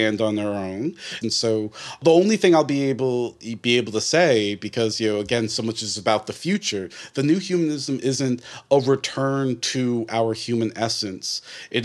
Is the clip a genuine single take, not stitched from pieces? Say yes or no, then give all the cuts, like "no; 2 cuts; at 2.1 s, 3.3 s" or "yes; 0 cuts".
no; 1 cut; at 1.2 s